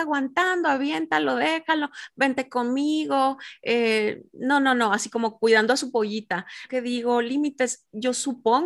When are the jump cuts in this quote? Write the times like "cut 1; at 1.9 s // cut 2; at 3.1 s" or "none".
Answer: cut 1; at 6.7 s